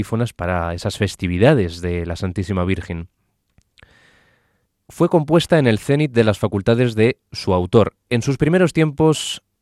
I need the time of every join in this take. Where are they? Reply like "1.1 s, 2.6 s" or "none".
none